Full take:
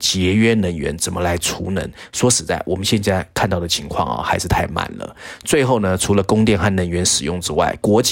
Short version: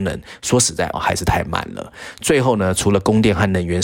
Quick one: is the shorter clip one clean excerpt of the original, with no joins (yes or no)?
no